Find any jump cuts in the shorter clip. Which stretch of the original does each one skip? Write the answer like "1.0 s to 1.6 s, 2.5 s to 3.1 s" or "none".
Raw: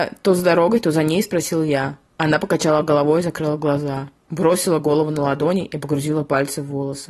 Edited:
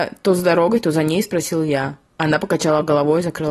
none